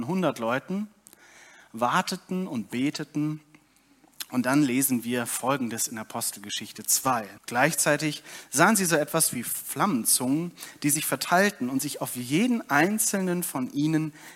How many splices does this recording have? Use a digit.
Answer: 1